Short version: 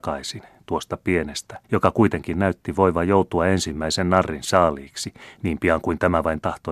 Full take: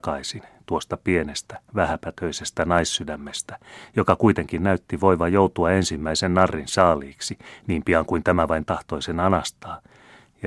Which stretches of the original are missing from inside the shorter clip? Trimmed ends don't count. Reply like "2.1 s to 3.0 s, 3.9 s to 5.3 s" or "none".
1.6 s to 3.9 s